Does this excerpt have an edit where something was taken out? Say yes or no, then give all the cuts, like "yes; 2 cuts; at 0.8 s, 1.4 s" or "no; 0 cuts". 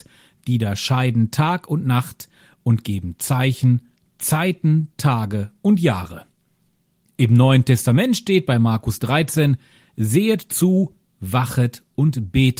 no; 0 cuts